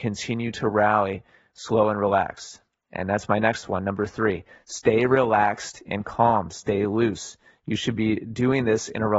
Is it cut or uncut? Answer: uncut